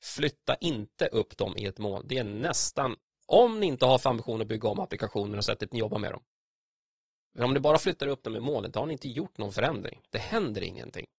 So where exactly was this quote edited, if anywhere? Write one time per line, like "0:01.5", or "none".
none